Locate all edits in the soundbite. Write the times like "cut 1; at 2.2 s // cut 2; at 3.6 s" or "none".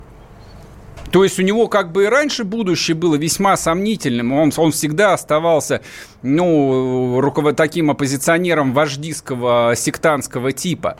none